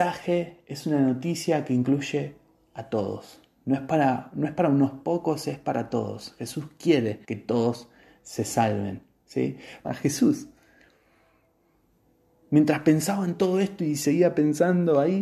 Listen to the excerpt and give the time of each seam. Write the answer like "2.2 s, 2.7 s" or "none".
7.2 s, 9.8 s